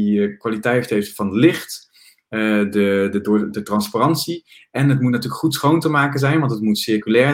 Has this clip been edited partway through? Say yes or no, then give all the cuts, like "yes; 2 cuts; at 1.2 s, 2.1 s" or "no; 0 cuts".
no; 0 cuts